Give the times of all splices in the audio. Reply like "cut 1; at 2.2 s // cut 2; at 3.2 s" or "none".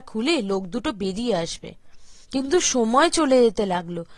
cut 1; at 2.2 s